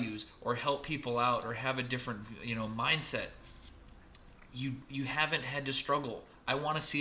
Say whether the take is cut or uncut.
uncut